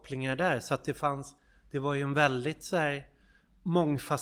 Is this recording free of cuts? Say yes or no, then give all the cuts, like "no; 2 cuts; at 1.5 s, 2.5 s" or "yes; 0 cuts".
yes; 0 cuts